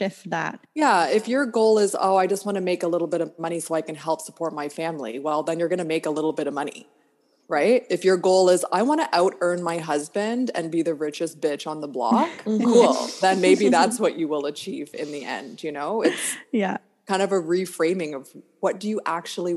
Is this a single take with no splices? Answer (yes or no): yes